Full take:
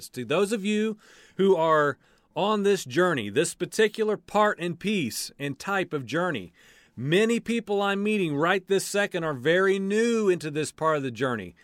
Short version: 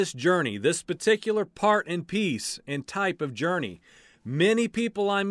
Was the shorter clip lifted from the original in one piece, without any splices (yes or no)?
yes